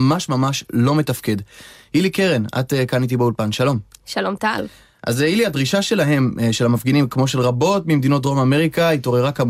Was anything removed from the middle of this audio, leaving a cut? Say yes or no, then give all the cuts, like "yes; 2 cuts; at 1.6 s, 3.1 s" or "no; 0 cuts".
no; 0 cuts